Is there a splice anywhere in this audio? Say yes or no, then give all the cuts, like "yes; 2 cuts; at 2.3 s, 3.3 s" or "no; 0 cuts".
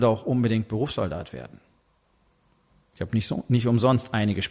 no; 0 cuts